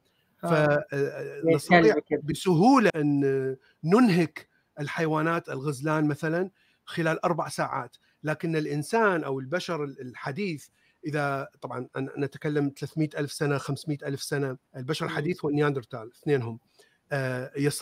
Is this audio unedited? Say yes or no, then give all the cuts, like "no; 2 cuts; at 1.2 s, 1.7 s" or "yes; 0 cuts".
no; 2 cuts; at 2.9 s, 14.6 s